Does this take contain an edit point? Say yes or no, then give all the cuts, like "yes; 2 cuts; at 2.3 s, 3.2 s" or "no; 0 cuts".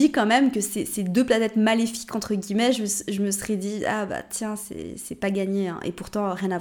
no; 0 cuts